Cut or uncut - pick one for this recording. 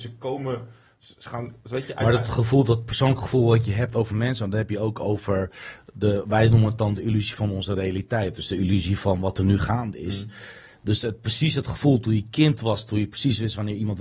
uncut